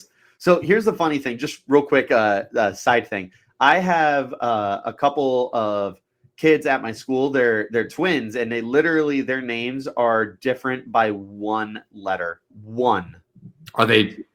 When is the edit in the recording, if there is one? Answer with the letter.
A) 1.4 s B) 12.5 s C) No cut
B